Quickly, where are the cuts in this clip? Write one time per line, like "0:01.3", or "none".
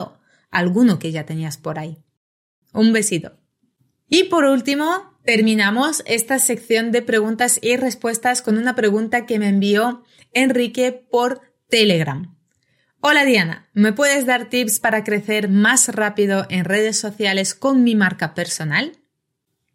0:02.6